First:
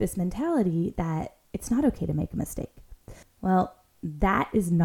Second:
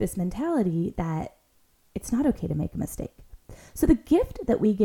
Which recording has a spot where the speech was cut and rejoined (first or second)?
first